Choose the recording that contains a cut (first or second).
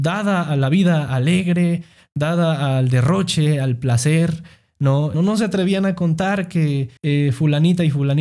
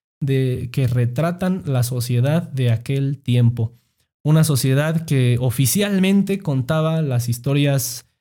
first